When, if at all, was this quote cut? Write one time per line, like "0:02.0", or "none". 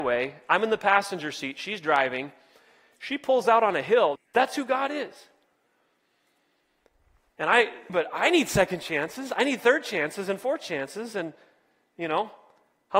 0:04.2
0:07.9